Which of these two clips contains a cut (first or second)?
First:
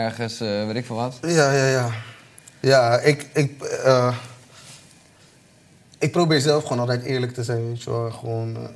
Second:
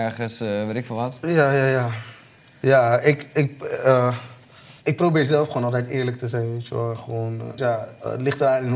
second